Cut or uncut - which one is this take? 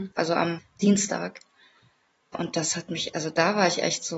uncut